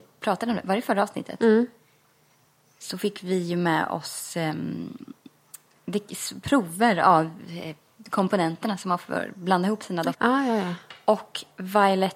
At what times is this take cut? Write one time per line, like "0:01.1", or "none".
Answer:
0:10.1